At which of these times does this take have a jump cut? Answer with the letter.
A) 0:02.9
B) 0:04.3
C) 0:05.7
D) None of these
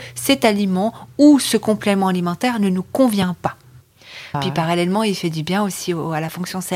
B